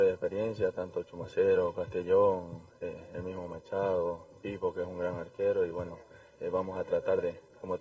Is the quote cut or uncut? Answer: uncut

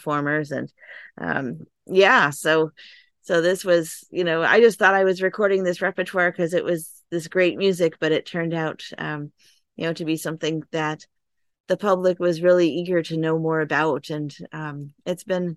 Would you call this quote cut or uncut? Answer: uncut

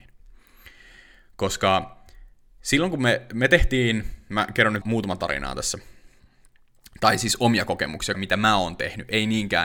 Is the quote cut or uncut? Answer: cut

